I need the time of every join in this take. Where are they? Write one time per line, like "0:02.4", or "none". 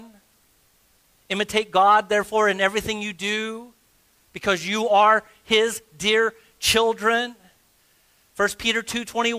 none